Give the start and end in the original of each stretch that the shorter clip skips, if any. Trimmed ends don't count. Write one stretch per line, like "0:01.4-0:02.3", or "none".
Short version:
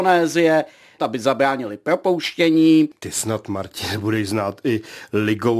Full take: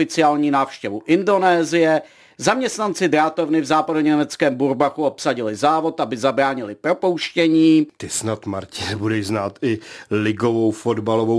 0:02.4-0:06.0